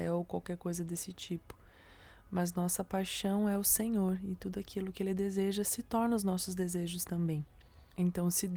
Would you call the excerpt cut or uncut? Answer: uncut